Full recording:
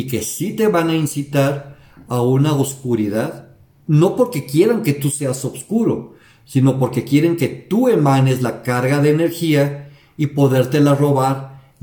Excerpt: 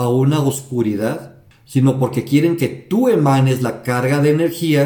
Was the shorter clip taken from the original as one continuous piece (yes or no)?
no